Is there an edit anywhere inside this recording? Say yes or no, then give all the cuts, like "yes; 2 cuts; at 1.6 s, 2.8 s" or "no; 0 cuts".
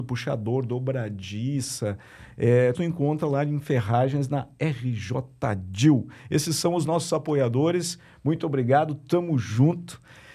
yes; 1 cut; at 2.7 s